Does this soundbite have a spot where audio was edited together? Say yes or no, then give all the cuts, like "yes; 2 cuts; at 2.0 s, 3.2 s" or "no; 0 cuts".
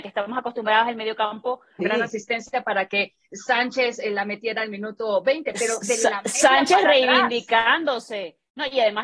yes; 1 cut; at 1.8 s